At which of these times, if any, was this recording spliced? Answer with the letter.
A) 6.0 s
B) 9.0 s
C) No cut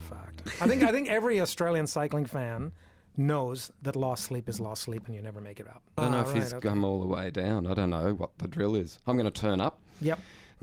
A